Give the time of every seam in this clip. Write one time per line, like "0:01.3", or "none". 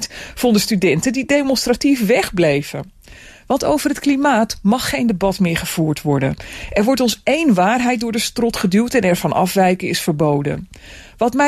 none